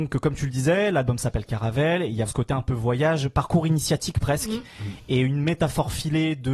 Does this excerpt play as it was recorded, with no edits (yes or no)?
no